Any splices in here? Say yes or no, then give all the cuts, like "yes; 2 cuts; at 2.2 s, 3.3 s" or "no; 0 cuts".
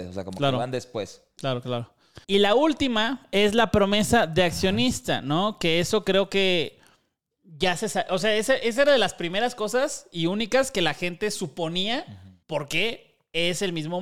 yes; 2 cuts; at 2.2 s, 12.4 s